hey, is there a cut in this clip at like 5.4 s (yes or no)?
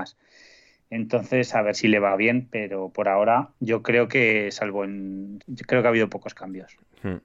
yes